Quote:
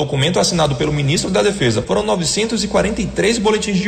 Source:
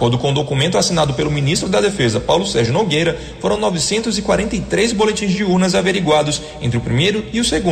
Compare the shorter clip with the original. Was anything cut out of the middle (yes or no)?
yes